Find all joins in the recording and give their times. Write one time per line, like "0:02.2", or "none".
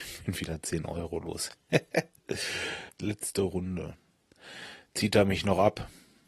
0:02.9